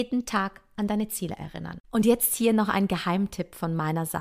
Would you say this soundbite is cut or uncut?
cut